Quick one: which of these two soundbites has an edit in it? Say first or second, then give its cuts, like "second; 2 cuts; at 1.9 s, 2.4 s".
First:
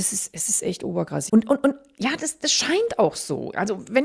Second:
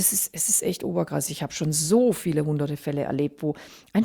first; 1 cut; at 1.3 s